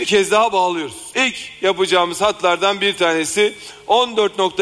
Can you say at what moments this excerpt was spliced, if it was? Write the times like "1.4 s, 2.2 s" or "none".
1.1 s